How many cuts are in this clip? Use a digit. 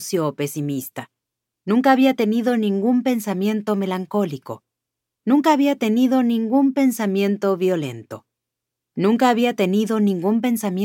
0